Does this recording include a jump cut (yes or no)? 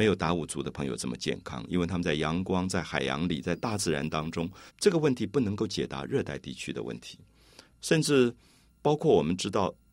yes